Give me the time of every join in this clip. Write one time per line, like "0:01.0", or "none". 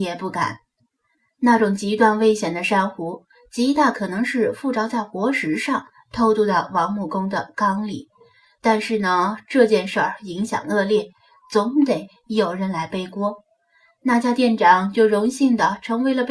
none

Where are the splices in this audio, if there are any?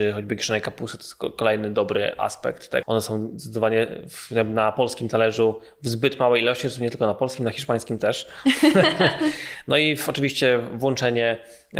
0:02.8

